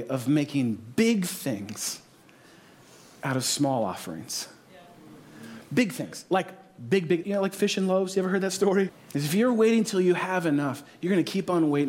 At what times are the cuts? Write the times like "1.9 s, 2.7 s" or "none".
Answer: 7.2 s, 8.9 s